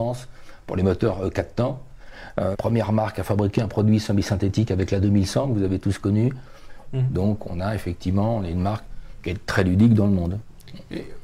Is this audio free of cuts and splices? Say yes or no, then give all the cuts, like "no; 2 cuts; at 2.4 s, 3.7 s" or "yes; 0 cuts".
no; 2 cuts; at 2.5 s, 6.8 s